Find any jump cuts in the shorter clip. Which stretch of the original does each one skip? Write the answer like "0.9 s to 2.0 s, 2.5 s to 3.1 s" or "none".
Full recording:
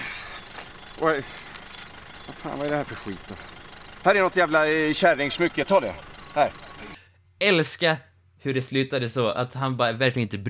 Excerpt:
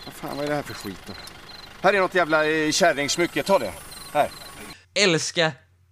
7.1 s to 7.3 s